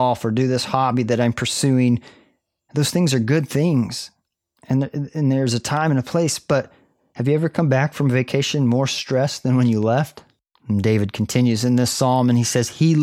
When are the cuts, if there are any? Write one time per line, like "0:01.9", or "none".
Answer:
0:10.5